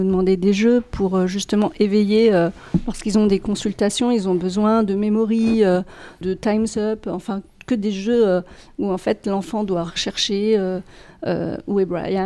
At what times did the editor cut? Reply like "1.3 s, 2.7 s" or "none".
6.2 s